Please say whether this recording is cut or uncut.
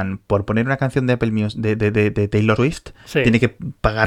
cut